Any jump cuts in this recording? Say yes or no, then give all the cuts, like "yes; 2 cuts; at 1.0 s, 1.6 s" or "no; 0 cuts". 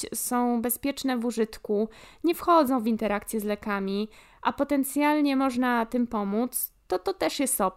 no; 0 cuts